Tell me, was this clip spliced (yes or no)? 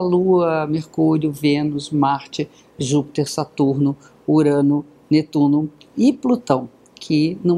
no